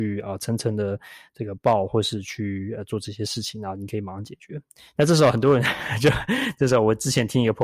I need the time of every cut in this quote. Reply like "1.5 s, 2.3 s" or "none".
none